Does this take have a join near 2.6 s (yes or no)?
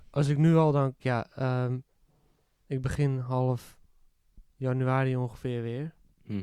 no